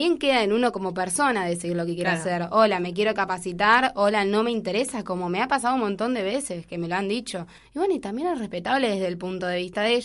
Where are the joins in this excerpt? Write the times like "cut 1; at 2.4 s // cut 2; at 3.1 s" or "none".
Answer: cut 1; at 7.6 s